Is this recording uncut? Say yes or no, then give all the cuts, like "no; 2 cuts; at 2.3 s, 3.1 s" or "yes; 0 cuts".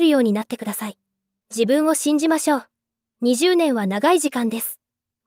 yes; 0 cuts